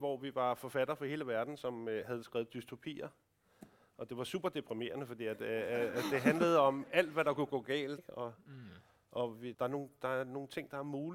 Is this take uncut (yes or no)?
no